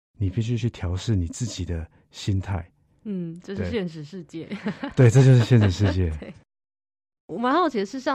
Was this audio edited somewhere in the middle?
no; 0 cuts

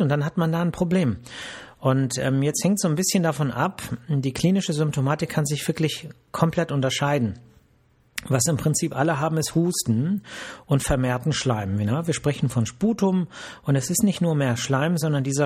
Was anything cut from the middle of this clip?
no; 0 cuts

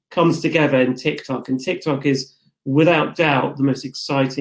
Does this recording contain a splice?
no; 0 cuts

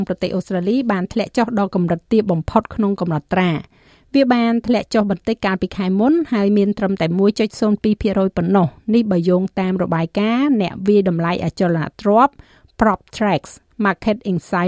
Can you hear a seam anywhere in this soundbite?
no; 0 cuts

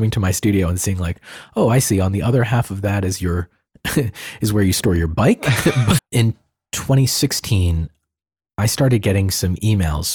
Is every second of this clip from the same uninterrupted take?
no; 1 cut; at 6.0 s

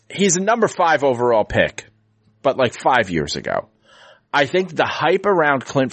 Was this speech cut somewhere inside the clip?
no; 0 cuts

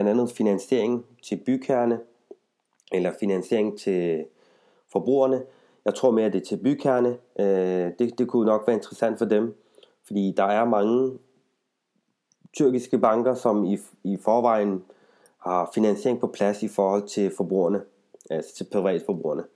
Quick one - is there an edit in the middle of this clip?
no; 0 cuts

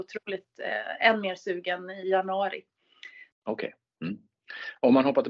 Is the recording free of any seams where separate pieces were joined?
no; 2 cuts; at 2.0 s, 3.3 s

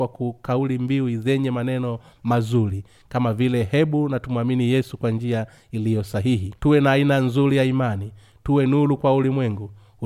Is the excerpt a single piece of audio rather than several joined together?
no; 1 cut; at 6.6 s

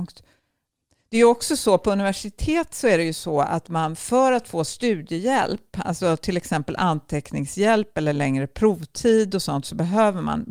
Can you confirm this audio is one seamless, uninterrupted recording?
yes; 0 cuts

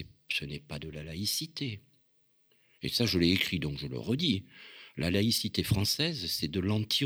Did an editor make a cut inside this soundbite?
no; 0 cuts

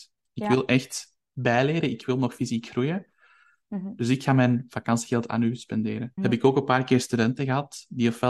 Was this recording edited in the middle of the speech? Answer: yes; 1 cut; at 6.2 s

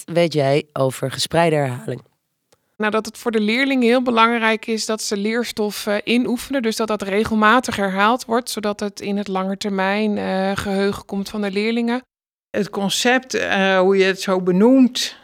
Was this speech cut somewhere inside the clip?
no; 0 cuts

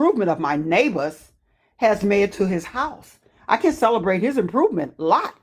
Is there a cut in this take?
no; 0 cuts

